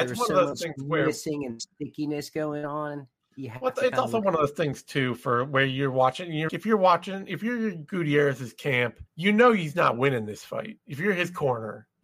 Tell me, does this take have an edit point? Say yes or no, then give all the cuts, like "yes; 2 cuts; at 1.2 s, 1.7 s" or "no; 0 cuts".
yes; 2 cuts; at 6.5 s, 9.1 s